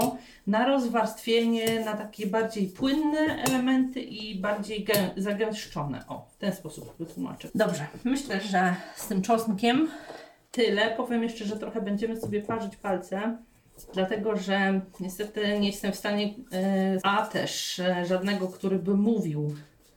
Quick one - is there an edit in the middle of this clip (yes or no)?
yes